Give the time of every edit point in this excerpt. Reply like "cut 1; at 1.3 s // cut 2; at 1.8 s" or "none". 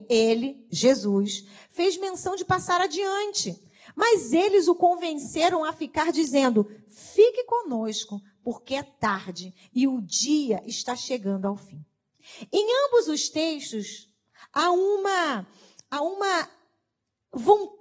none